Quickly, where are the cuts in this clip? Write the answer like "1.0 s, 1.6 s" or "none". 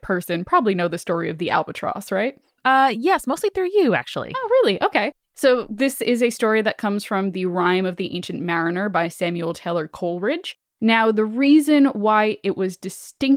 none